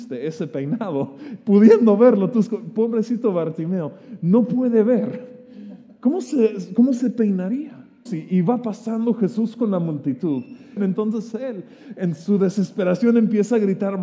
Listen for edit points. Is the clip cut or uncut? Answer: cut